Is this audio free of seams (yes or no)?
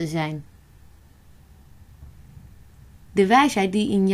yes